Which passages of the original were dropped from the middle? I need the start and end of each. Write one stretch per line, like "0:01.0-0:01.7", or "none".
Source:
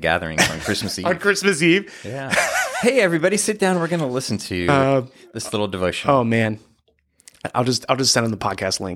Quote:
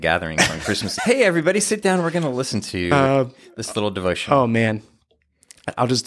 0:01.0-0:02.7